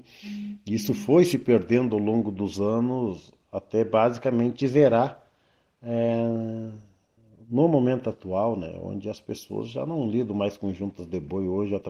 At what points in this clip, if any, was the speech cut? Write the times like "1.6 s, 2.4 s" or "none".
none